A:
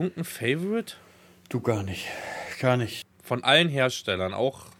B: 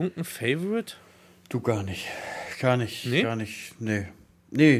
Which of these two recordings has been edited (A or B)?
A